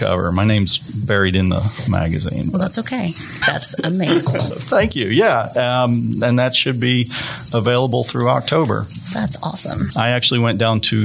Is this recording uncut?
no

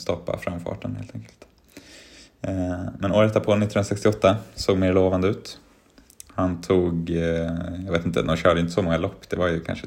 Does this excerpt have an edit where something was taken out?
no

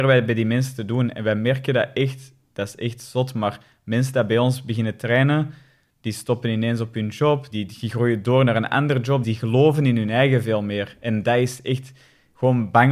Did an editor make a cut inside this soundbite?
yes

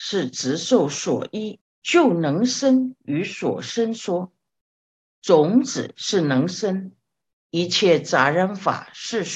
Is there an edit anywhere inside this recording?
yes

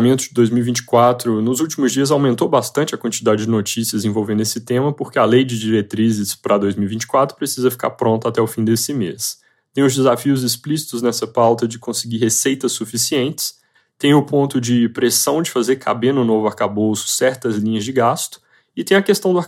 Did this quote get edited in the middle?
no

